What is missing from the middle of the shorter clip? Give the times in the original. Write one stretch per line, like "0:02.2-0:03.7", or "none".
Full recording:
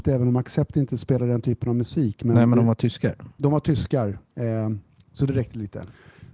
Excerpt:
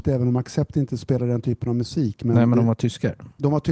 none

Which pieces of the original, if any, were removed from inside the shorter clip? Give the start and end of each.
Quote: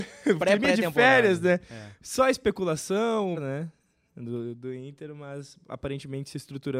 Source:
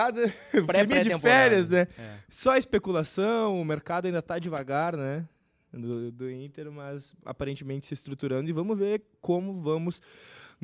0:03.6-0:04.9

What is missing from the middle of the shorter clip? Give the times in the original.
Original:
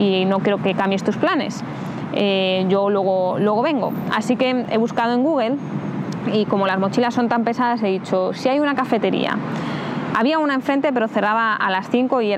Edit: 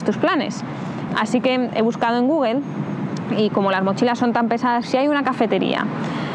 0:02.1-0:04.0
0:07.8-0:08.3

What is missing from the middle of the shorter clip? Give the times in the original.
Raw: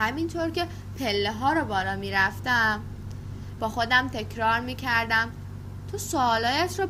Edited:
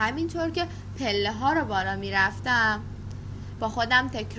none

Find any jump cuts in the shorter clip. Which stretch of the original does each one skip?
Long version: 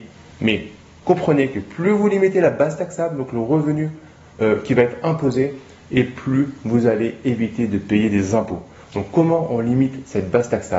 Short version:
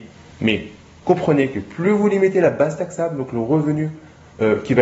none

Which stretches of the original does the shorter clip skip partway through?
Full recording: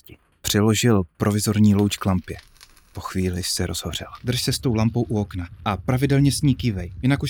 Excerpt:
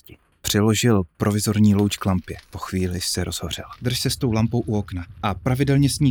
0:02.5-0:02.9

